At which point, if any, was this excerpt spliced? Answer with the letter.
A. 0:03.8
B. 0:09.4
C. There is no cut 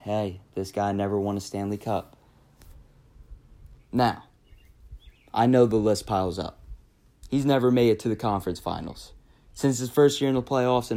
A